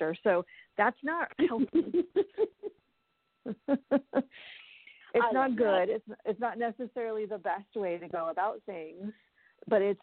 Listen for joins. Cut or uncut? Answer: uncut